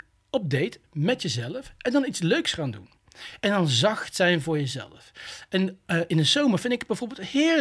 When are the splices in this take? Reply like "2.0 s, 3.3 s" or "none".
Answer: none